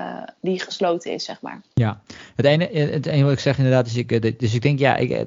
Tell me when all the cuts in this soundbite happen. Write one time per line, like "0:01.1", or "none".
0:01.7

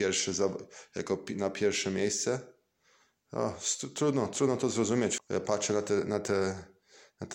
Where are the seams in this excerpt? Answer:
0:05.2

